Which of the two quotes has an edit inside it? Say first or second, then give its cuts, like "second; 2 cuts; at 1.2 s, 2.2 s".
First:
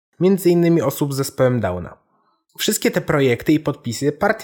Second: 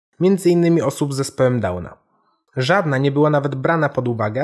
second; 1 cut; at 2.5 s